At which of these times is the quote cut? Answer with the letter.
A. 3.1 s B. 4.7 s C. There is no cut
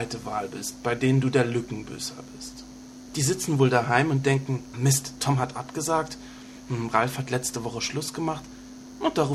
B